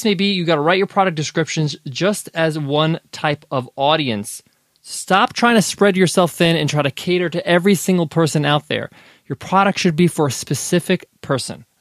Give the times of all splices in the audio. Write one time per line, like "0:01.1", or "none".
none